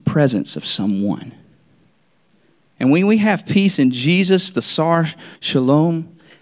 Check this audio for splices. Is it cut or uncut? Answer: cut